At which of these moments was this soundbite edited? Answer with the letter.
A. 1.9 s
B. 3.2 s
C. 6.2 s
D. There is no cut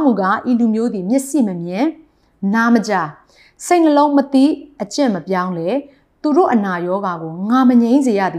D